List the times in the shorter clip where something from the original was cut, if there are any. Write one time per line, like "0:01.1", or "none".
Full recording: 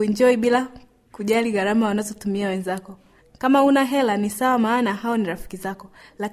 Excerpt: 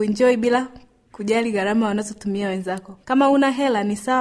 0:03.0